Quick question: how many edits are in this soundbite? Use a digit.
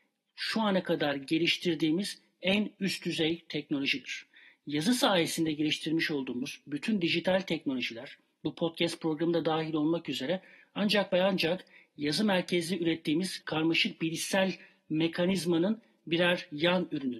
1